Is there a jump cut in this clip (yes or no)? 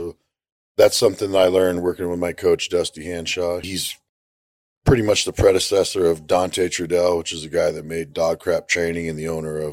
yes